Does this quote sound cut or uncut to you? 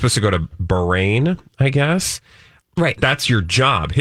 cut